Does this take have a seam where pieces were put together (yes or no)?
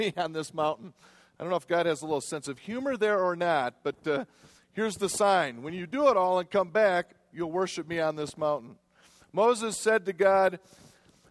no